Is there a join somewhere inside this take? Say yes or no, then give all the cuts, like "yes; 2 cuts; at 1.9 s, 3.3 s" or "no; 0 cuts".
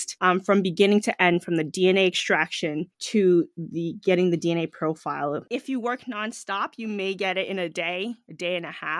no; 0 cuts